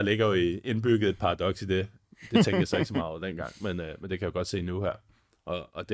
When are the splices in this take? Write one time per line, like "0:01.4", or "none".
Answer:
none